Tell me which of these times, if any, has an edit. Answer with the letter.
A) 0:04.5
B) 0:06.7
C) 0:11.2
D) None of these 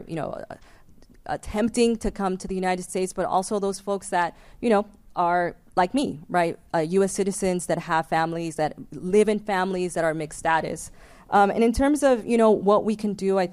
D